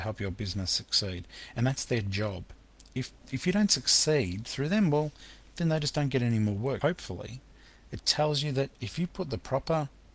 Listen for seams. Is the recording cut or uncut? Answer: cut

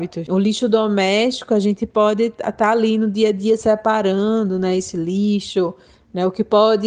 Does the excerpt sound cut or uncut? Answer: uncut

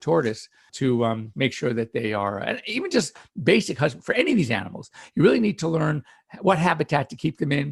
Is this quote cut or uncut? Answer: uncut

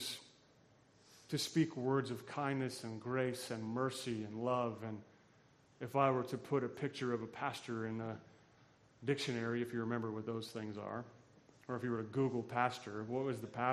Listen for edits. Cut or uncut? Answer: uncut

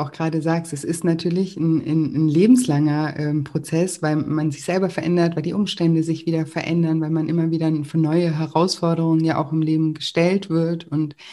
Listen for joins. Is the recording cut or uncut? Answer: uncut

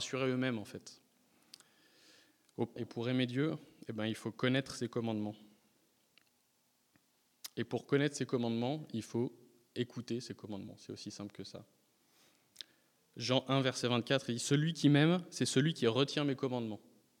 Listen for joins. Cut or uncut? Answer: cut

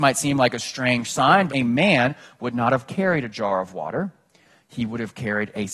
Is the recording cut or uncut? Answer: cut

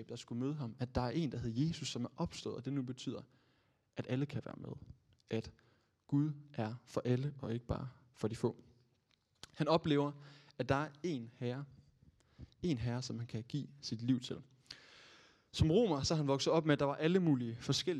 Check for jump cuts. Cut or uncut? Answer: uncut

